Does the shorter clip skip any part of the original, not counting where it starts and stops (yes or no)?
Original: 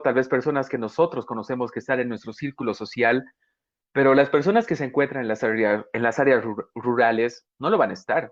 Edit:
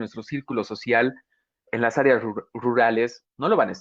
yes